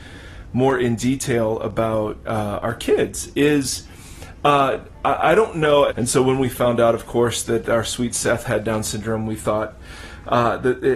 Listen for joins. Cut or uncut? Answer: cut